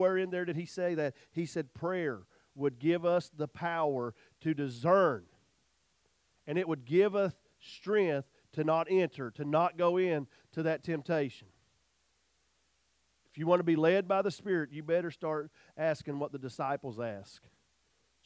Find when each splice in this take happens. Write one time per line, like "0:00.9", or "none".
none